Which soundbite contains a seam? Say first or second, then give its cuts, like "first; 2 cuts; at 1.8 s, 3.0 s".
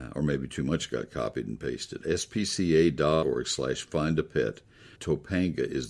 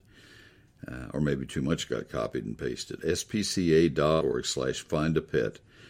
first; 1 cut; at 5.0 s